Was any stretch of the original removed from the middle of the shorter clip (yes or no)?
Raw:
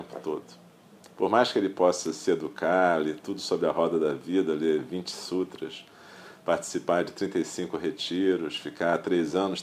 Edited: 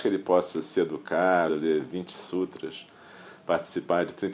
yes